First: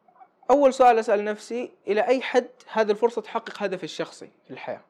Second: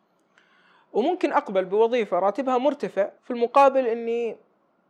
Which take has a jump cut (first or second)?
second